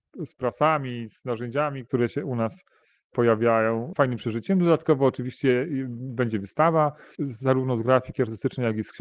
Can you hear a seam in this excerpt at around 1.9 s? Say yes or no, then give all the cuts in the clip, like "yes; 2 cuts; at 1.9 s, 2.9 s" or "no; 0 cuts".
no; 2 cuts; at 3.9 s, 7.2 s